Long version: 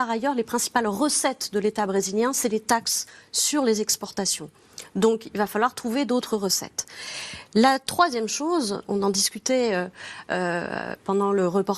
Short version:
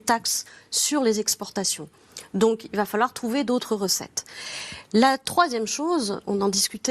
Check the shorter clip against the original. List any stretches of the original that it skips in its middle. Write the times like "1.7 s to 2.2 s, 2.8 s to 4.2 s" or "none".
none